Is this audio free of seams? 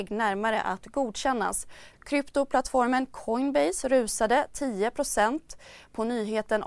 no; 1 cut; at 1.9 s

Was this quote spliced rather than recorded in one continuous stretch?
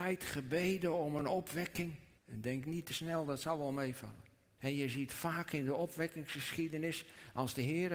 yes; 2 cuts; at 2.2 s, 4.6 s

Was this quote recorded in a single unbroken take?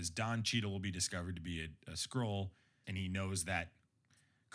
no; 1 cut; at 2.8 s

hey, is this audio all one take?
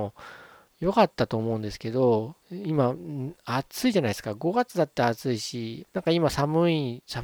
no; 2 cuts; at 2.4 s, 5.9 s

